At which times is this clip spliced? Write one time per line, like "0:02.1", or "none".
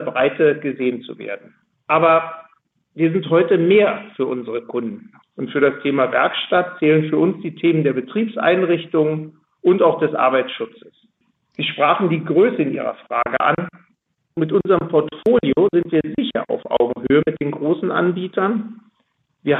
0:01.7
0:05.2